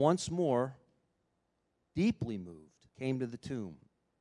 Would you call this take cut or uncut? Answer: cut